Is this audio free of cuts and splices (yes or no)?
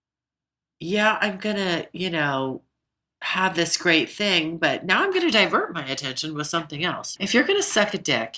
no